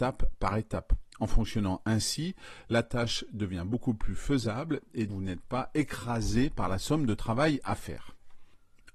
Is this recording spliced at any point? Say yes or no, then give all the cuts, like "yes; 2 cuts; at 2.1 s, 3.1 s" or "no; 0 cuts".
yes; 2 cuts; at 1.1 s, 5.1 s